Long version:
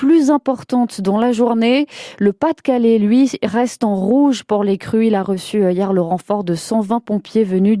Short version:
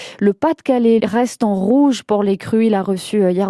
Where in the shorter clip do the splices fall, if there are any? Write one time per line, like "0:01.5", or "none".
0:01.0